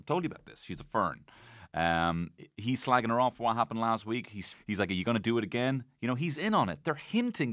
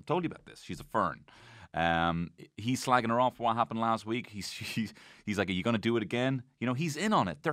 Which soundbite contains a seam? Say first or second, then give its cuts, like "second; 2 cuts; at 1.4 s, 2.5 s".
first; 1 cut; at 4.5 s